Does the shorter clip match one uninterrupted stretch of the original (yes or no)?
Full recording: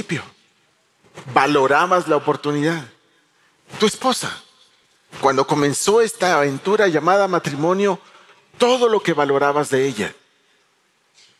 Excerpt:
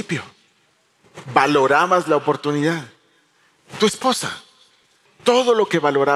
no